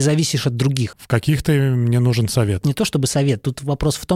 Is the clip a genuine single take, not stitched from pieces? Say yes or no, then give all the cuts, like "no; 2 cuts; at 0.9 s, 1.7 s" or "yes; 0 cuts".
no; 1 cut; at 0.9 s